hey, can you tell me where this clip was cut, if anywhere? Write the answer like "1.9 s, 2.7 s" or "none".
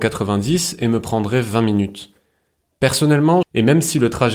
3.4 s